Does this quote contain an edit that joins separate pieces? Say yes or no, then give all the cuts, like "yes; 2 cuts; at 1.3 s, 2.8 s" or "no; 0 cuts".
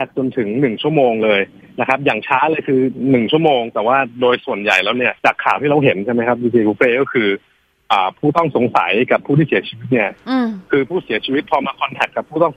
yes; 1 cut; at 5.2 s